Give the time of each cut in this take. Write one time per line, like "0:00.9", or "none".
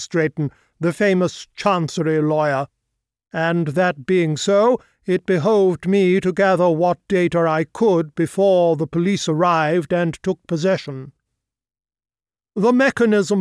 0:03.3